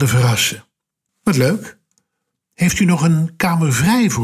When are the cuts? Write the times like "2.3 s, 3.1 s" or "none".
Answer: 1.1 s